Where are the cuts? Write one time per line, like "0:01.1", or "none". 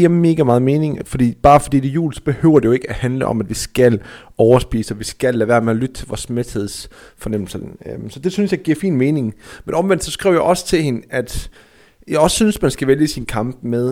none